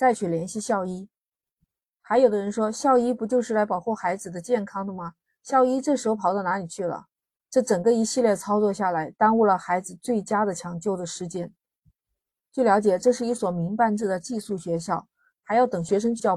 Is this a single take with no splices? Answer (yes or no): no